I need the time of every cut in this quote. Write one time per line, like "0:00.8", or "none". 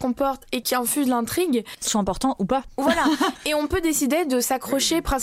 none